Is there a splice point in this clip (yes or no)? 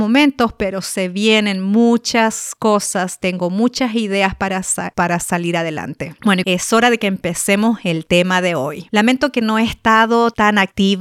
yes